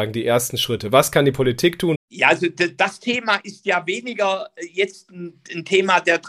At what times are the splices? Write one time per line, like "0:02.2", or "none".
0:02.0